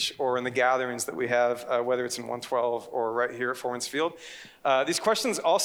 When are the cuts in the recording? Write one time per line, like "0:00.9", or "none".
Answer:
none